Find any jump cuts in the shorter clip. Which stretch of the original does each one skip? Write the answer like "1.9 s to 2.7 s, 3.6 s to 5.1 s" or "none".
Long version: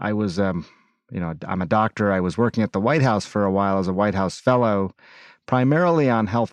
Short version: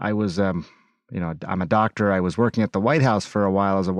none